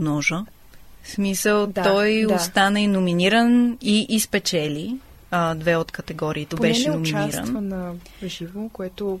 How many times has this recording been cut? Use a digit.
1